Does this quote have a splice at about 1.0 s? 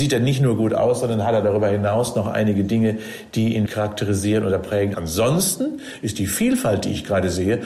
no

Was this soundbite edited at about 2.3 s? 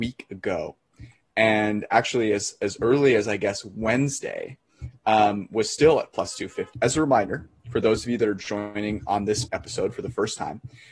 no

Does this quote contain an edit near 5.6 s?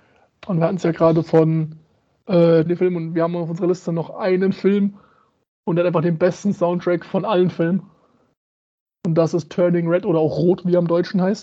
no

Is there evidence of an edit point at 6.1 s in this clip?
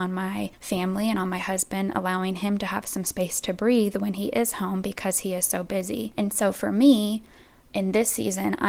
yes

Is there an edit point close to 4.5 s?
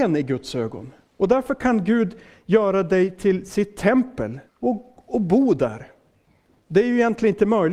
yes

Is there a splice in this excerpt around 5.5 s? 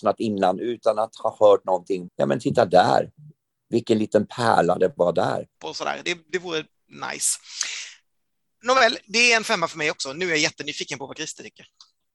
yes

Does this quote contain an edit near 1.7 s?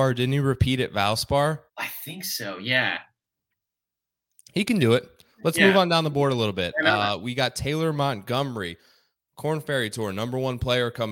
yes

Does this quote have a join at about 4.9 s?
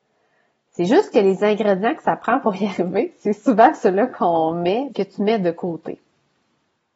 yes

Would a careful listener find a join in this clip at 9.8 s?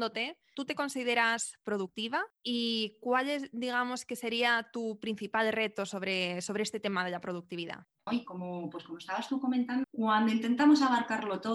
yes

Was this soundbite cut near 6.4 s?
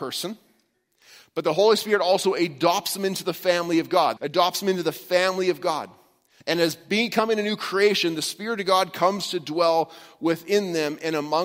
yes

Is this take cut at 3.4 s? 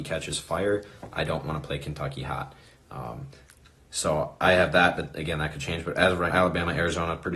no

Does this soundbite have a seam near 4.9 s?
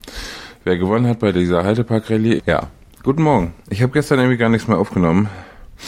no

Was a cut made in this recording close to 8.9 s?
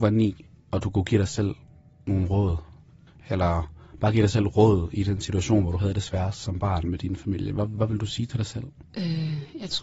yes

